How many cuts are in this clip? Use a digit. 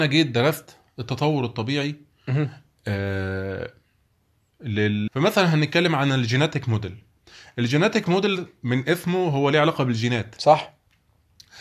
1